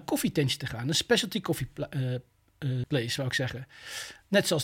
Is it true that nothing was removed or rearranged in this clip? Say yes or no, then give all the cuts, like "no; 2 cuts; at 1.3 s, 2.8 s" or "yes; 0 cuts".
no; 1 cut; at 2.8 s